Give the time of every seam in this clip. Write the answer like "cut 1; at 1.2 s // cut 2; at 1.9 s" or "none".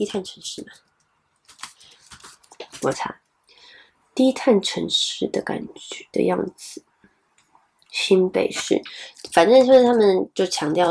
cut 1; at 2.9 s